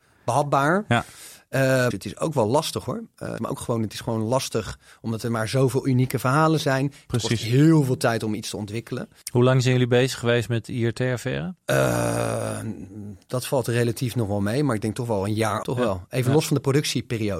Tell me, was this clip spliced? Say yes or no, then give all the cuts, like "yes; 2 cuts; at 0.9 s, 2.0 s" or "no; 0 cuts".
yes; 3 cuts; at 1.9 s, 3.4 s, 15.6 s